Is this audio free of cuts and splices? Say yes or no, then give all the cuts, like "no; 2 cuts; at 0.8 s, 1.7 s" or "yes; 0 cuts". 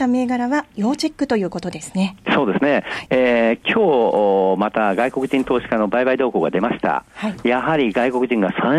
no; 1 cut; at 3.1 s